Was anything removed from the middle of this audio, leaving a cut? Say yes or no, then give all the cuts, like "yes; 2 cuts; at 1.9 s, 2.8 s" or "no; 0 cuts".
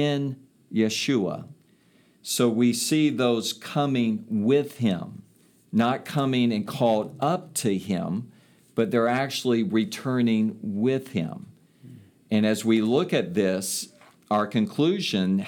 no; 0 cuts